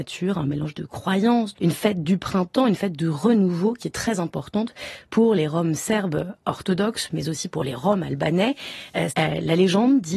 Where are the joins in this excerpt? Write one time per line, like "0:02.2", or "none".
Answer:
0:01.5
0:09.1